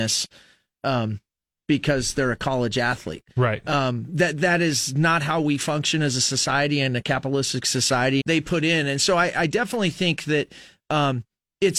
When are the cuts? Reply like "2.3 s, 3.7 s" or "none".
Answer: 8.2 s